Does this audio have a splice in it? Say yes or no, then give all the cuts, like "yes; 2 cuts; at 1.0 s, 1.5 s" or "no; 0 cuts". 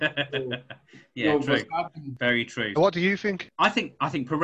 yes; 1 cut; at 2.8 s